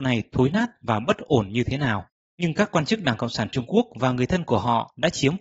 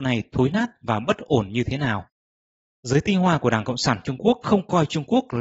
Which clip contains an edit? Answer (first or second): first